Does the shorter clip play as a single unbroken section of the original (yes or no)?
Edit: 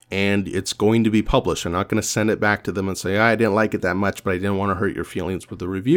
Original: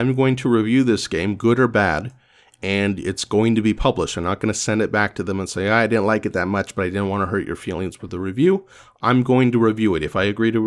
yes